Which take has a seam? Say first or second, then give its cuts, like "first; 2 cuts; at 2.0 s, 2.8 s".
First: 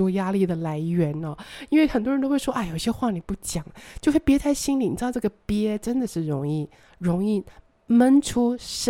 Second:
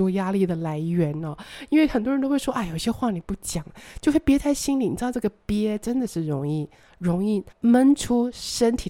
second; 1 cut; at 7.5 s